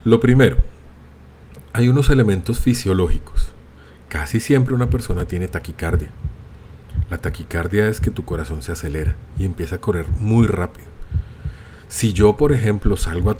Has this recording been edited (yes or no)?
no